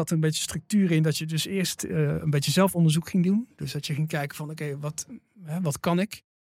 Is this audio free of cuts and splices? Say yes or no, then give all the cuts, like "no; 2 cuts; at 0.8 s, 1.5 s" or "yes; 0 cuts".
yes; 0 cuts